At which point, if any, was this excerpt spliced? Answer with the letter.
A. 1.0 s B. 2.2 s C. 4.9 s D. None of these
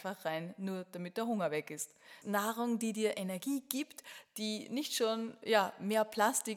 B